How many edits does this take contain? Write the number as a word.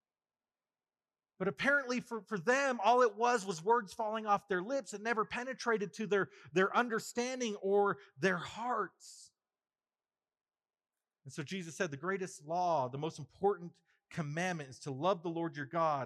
zero